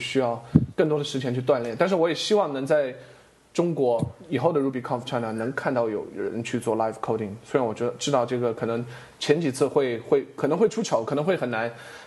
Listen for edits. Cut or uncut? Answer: uncut